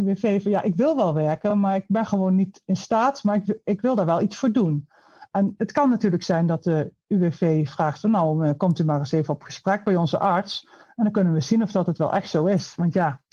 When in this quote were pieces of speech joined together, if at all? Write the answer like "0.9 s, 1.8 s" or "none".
none